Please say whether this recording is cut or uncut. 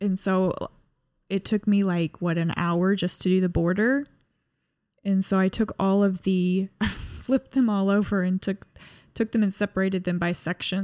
uncut